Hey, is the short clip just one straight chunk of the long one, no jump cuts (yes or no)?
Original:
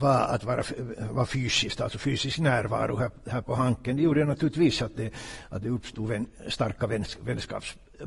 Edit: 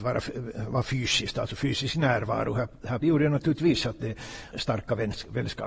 no